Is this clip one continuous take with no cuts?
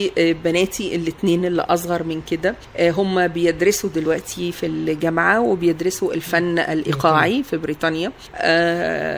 yes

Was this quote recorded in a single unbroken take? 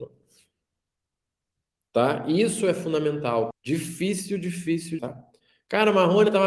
no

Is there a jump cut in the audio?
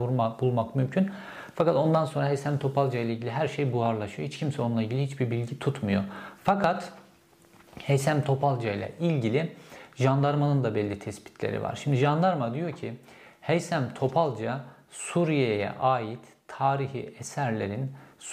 yes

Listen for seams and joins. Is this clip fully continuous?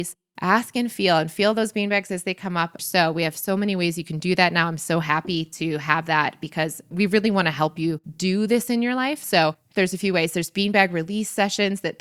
no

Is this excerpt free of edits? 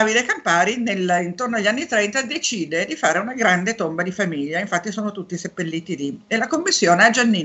yes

